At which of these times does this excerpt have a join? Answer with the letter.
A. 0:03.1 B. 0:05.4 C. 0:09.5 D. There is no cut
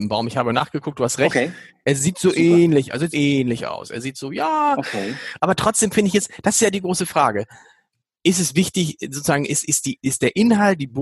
A